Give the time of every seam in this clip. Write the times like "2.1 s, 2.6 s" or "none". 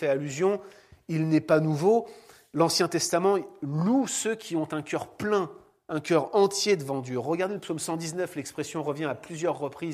none